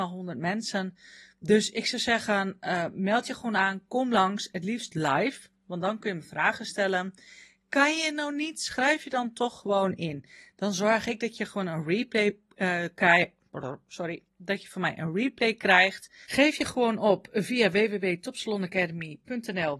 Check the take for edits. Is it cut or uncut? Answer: cut